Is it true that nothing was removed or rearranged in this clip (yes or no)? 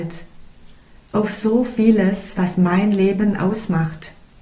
yes